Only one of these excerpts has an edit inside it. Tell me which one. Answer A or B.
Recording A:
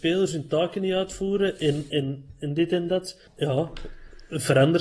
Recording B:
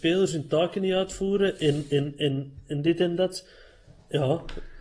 A